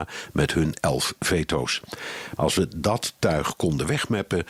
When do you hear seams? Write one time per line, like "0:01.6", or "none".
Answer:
0:02.4